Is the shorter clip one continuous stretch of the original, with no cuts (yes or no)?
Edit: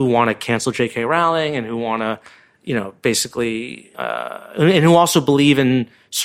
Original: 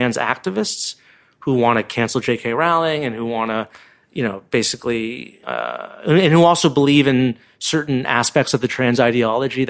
yes